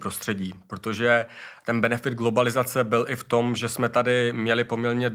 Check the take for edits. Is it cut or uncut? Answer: uncut